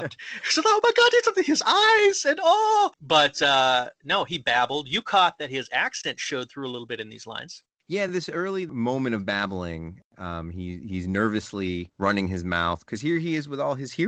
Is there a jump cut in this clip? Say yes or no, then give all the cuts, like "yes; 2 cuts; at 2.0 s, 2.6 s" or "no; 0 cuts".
no; 0 cuts